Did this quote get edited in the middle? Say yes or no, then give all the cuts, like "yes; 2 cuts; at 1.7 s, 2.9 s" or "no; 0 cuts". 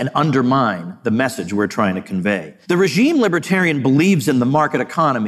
yes; 1 cut; at 2.6 s